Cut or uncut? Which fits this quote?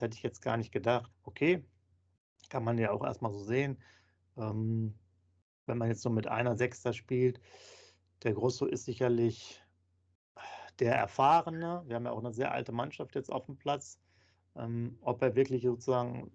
cut